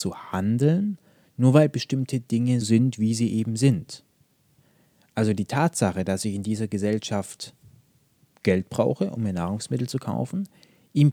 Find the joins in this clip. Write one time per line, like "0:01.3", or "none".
0:02.6